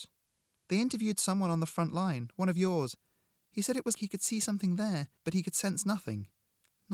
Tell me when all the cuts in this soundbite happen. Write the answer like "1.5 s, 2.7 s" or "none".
3.9 s, 5.2 s